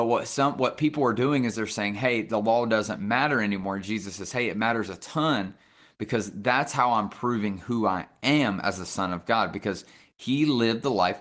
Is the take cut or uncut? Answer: uncut